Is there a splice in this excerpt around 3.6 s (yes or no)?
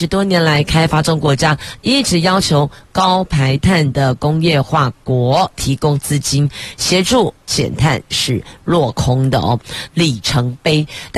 no